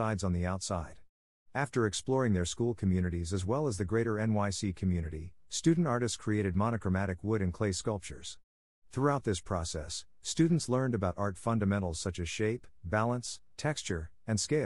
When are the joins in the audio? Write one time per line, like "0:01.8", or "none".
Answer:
0:01.5

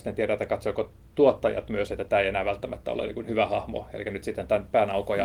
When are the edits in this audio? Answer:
none

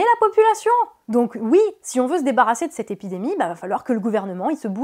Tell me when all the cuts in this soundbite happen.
none

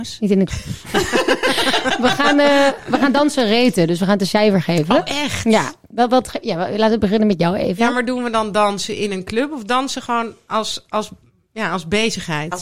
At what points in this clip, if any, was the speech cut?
none

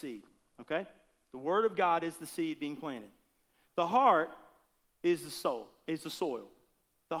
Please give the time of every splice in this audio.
none

